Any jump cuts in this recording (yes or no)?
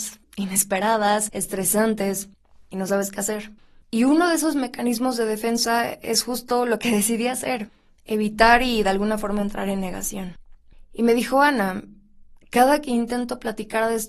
no